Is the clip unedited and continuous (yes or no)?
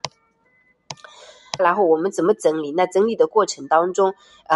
no